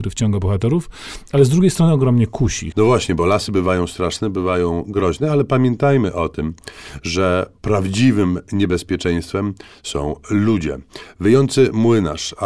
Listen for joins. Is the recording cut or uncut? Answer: cut